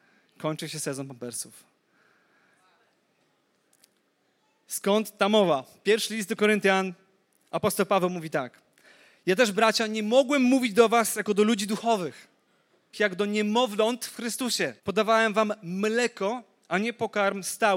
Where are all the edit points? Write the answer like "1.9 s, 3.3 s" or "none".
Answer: 12.9 s, 14.8 s